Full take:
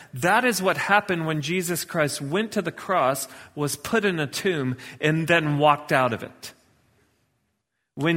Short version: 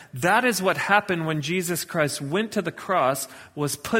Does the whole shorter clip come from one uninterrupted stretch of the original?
yes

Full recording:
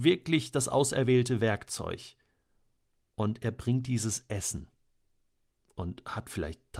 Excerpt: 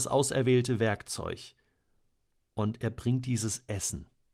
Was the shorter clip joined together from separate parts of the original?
no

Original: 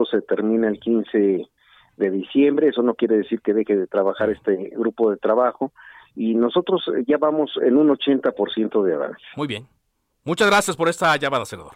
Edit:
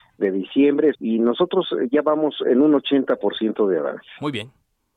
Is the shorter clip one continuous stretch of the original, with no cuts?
no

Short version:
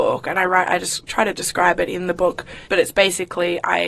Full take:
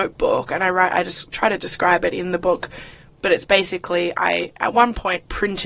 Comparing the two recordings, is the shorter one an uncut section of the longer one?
no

